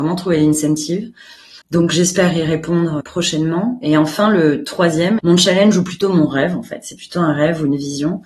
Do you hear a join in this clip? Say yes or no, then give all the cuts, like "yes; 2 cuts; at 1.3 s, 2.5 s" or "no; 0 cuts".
yes; 3 cuts; at 1.6 s, 3.0 s, 5.2 s